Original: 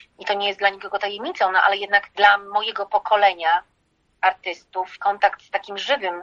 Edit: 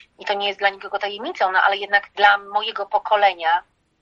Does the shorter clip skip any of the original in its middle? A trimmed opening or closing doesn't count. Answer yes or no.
no